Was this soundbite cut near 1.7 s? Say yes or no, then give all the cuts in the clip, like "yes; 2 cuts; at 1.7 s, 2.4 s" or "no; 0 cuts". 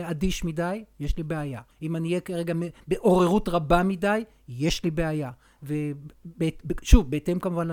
yes; 1 cut; at 1.7 s